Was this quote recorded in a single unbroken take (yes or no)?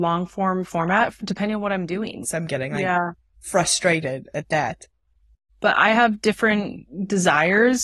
no